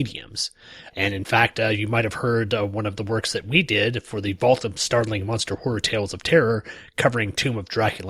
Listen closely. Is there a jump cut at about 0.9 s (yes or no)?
yes